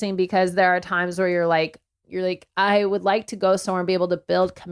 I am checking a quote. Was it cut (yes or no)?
yes